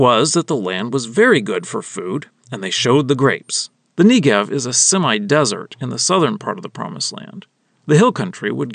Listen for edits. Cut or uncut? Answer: cut